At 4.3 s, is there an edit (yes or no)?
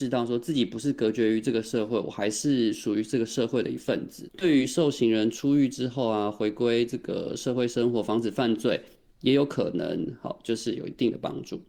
yes